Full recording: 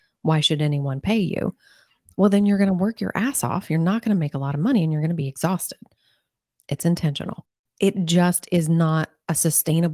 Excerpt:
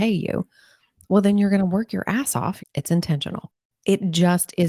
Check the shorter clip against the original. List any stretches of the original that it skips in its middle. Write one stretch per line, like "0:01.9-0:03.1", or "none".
0:03.7-0:06.5